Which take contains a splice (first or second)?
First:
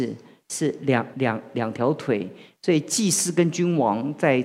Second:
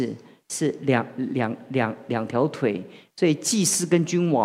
first